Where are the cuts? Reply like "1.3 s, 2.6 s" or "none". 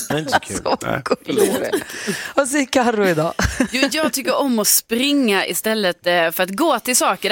none